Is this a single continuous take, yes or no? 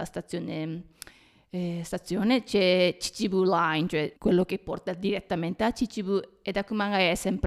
no